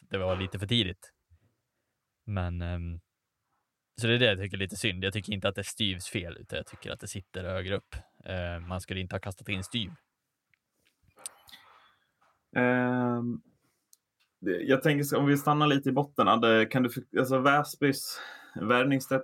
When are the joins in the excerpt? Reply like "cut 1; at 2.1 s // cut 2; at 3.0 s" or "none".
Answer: none

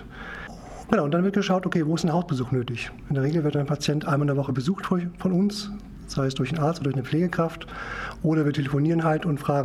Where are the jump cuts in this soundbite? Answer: none

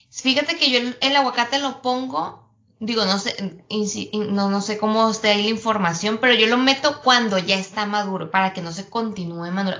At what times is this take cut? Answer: none

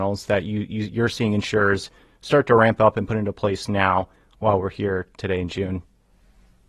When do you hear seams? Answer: none

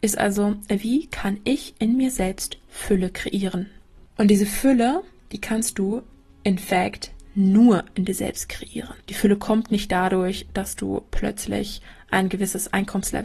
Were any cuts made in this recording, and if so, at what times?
cut 1; at 9.0 s

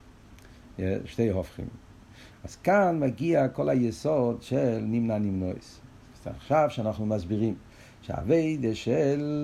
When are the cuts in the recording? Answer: cut 1; at 6.1 s

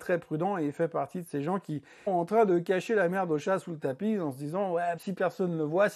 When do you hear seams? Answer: cut 1; at 2.1 s // cut 2; at 5.0 s

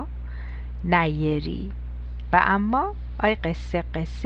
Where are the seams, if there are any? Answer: cut 1; at 3.4 s

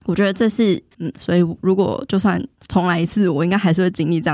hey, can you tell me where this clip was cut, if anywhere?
cut 1; at 0.9 s

